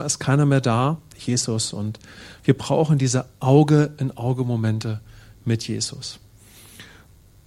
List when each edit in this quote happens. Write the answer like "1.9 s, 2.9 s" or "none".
1.1 s